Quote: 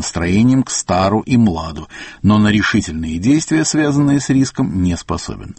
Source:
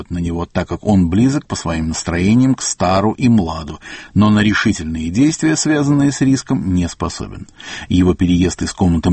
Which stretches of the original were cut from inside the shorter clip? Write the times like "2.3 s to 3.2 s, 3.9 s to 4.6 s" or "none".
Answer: none